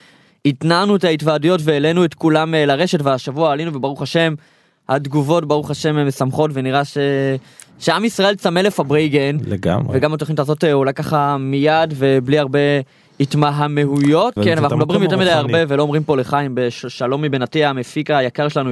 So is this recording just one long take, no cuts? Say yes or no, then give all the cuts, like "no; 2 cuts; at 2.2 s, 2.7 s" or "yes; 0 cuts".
yes; 0 cuts